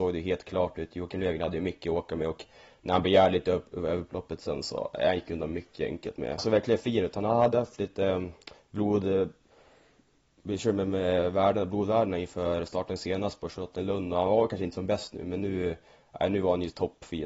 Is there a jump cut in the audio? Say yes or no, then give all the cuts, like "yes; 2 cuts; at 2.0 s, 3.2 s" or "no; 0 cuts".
yes; 1 cut; at 6.4 s